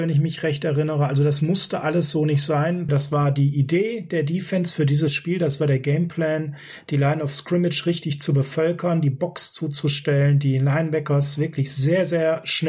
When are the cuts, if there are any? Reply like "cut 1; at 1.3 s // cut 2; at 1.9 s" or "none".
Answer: cut 1; at 2.9 s